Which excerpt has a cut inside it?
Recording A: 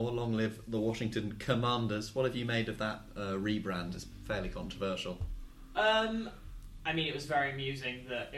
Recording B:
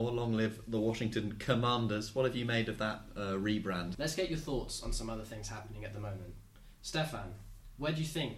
B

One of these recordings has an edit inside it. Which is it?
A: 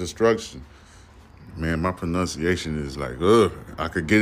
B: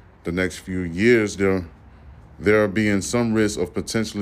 A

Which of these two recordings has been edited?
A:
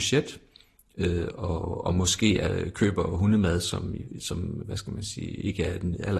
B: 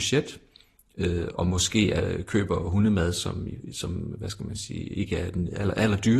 B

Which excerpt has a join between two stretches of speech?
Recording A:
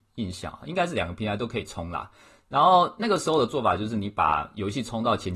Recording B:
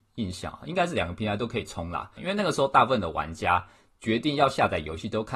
B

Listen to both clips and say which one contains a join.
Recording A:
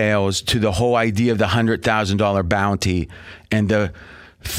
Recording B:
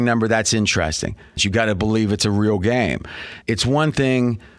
B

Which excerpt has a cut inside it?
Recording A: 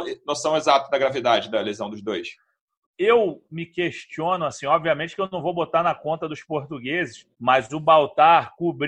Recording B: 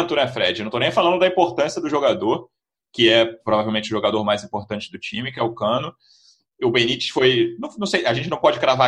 A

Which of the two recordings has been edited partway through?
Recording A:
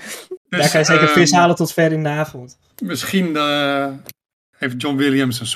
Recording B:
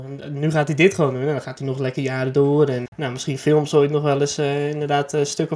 B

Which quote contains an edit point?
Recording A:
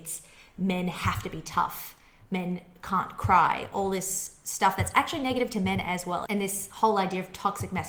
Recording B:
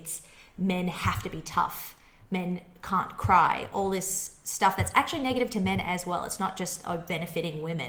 A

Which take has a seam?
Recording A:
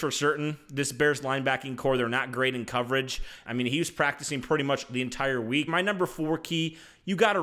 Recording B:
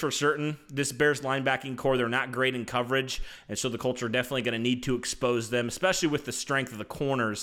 A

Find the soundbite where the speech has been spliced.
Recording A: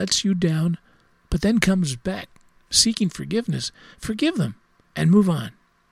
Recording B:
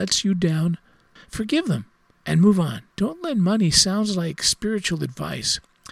B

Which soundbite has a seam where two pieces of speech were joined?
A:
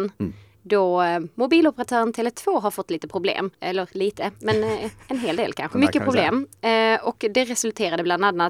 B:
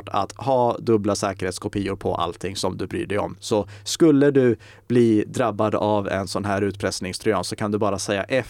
A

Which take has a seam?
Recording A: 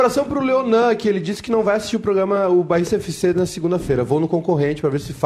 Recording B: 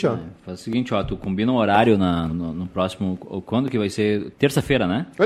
B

